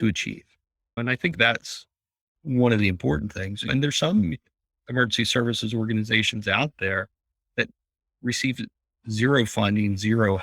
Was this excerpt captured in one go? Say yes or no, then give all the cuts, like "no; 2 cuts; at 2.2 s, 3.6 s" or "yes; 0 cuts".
yes; 0 cuts